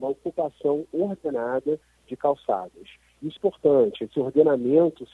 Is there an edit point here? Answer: yes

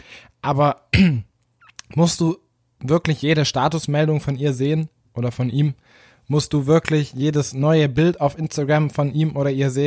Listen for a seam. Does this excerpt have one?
no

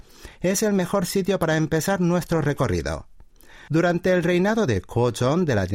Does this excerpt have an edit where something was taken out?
yes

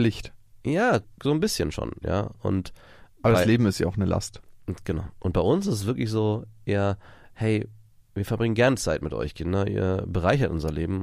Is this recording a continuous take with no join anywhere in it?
yes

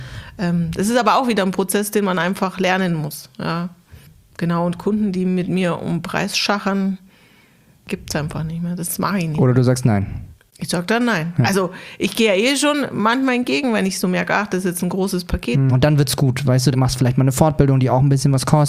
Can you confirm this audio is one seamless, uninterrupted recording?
no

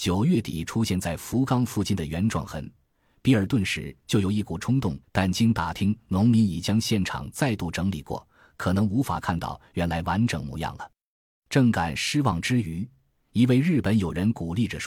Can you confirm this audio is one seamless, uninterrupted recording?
no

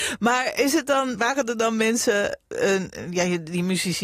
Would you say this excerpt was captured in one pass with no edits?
no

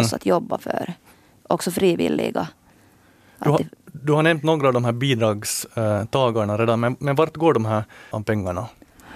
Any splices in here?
yes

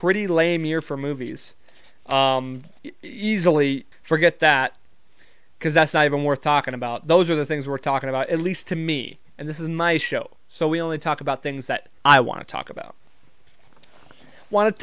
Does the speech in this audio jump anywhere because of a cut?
yes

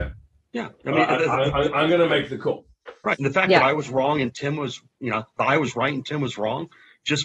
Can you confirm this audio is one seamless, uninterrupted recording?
yes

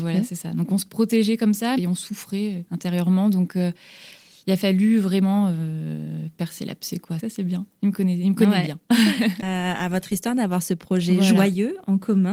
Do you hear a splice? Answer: yes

